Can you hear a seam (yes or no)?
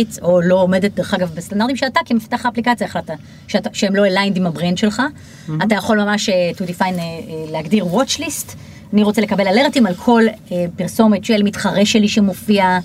no